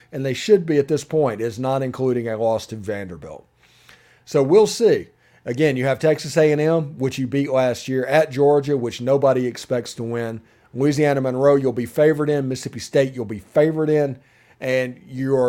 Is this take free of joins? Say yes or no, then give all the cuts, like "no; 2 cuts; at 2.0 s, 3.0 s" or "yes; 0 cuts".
yes; 0 cuts